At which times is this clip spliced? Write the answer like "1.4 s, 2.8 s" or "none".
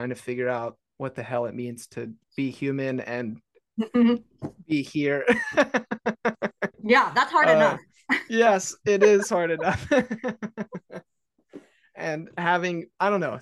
2.2 s, 6.7 s

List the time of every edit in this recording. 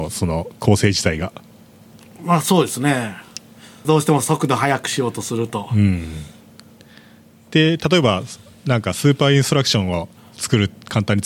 3.8 s

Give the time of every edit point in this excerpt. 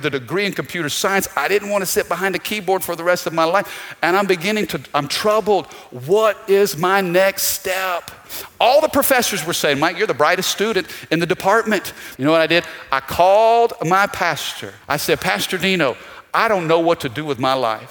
12.2 s, 14.8 s

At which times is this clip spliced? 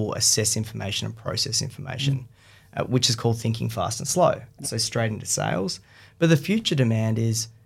4.6 s

